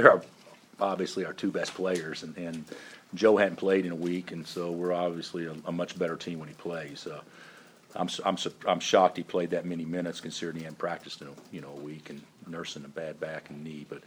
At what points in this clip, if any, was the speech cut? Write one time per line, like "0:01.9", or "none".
none